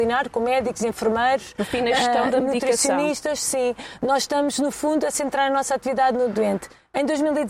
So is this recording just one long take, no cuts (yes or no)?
yes